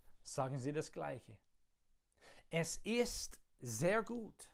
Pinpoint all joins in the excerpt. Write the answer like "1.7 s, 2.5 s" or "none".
none